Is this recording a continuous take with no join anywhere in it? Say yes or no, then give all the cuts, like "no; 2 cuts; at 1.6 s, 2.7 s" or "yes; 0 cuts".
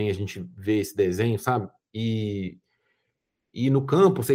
yes; 0 cuts